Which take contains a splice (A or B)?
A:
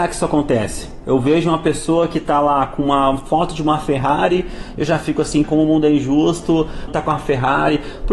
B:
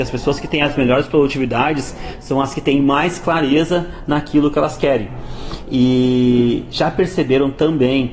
A